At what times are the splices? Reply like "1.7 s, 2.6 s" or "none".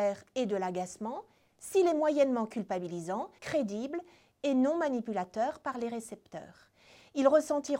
3.4 s